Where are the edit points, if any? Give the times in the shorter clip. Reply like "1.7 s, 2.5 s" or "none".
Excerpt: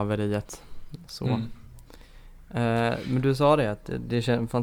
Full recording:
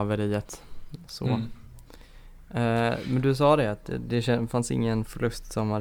none